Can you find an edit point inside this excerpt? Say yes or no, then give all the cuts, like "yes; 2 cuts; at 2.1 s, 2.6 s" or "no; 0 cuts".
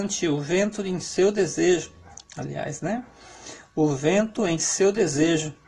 yes; 1 cut; at 2.2 s